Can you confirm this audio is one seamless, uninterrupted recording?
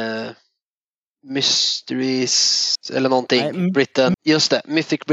no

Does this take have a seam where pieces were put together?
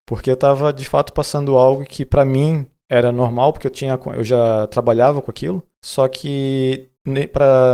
no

